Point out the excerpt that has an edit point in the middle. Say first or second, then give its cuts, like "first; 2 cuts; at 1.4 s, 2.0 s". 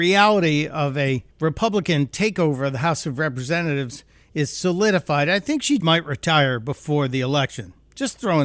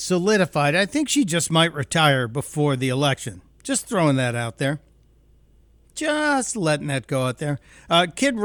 first; 2 cuts; at 1.3 s, 5.8 s